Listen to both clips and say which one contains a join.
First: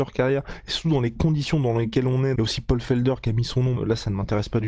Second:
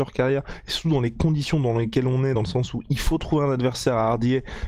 first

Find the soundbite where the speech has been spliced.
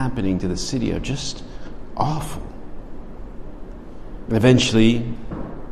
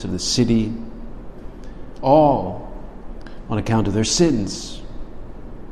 first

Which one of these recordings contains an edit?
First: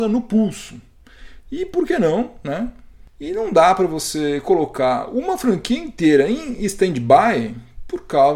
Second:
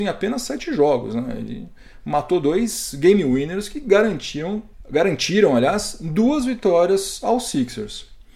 first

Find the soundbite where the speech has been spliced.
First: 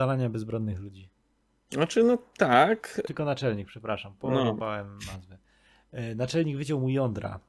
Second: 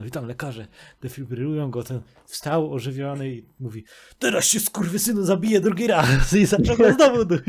first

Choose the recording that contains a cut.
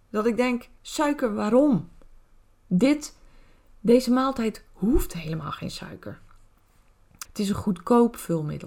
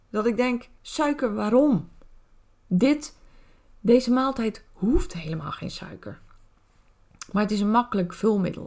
first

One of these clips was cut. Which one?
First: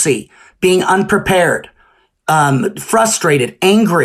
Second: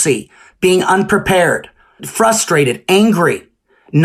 second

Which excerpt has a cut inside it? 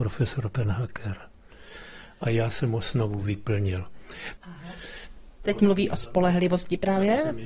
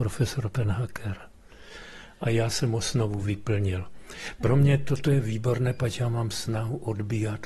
first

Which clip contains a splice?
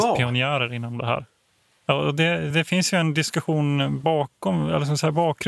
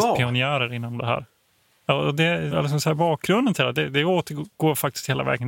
second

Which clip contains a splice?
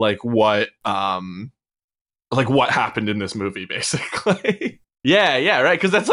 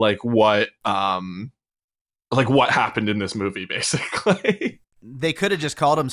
first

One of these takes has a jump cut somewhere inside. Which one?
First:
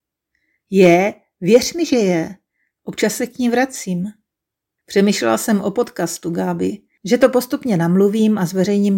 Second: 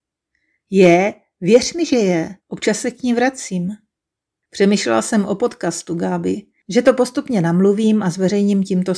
second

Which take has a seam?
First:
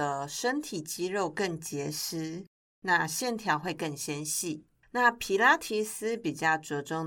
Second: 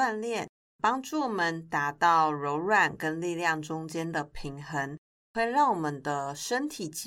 first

